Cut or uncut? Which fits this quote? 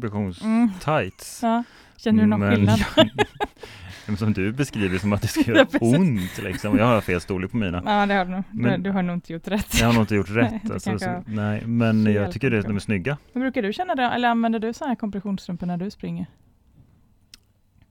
cut